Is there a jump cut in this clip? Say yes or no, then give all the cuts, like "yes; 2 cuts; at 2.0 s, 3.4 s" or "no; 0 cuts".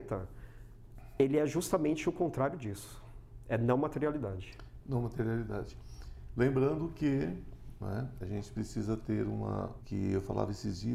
yes; 1 cut; at 9.8 s